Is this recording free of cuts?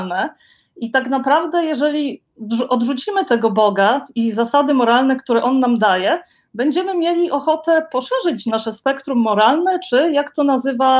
yes; 0 cuts

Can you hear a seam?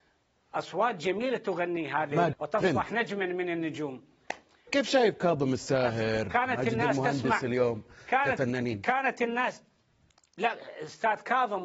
yes; 1 cut; at 2.3 s

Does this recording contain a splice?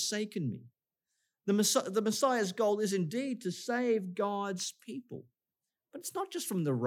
no; 0 cuts

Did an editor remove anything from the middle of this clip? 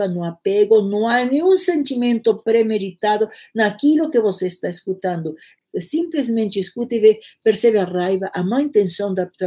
yes; 1 cut; at 5.6 s

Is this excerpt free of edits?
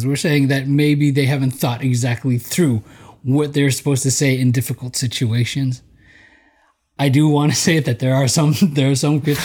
yes; 0 cuts

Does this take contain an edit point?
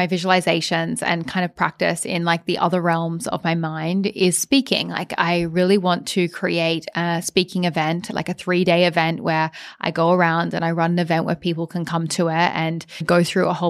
no; 0 cuts

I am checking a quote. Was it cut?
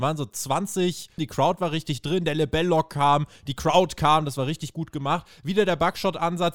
yes; 1 cut; at 1.2 s

